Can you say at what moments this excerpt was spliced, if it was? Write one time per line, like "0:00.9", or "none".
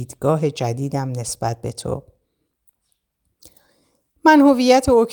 none